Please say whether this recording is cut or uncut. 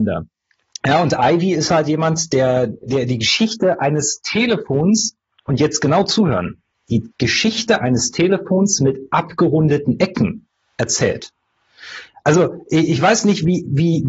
cut